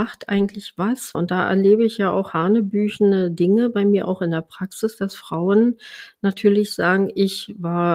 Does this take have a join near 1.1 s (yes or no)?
yes